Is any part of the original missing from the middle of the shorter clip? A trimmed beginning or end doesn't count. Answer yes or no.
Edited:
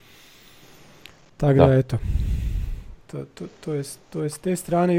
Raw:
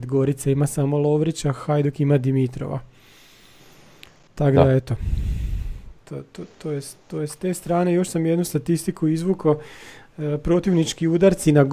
no